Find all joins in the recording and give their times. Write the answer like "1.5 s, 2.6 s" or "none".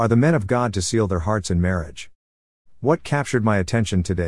2.7 s